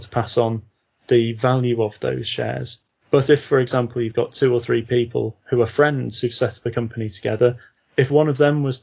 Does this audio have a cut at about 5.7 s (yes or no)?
no